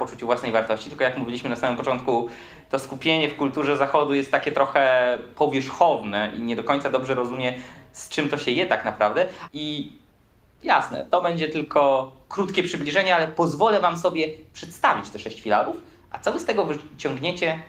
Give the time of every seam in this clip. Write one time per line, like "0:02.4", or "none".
0:09.5